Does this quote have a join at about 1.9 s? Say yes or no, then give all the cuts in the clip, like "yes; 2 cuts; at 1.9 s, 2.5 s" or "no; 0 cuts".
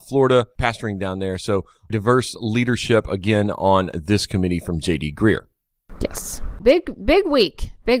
yes; 2 cuts; at 1.9 s, 6.6 s